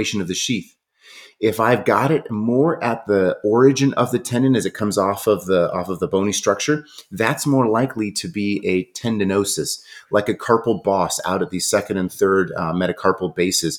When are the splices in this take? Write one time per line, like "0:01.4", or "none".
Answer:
none